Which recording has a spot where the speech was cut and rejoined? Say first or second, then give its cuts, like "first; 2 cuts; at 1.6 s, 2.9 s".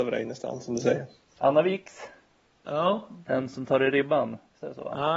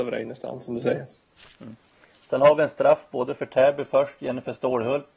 first; 1 cut; at 1.4 s